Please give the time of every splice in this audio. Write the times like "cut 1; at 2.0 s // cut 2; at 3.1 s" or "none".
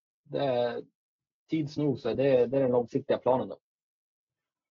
cut 1; at 2.1 s